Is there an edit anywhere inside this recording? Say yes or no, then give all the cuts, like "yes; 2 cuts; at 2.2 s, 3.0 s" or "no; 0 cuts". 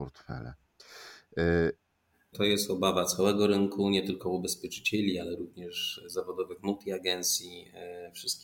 yes; 1 cut; at 2.3 s